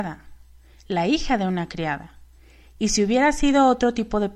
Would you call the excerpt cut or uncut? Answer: uncut